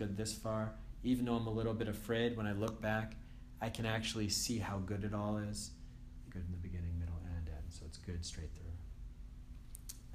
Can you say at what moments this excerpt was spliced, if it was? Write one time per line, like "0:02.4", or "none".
0:06.3